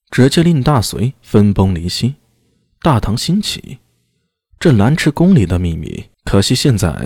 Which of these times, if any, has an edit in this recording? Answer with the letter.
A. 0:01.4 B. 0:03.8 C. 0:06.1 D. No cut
C